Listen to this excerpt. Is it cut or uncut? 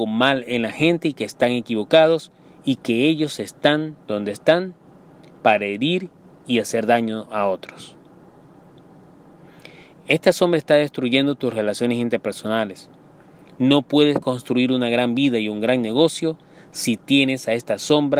uncut